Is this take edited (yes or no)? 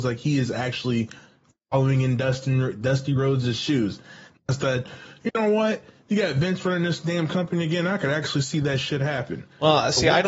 no